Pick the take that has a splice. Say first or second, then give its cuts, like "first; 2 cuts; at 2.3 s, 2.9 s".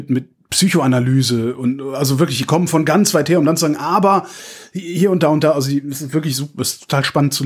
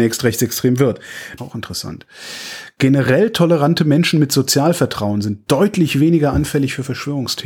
second; 1 cut; at 1.4 s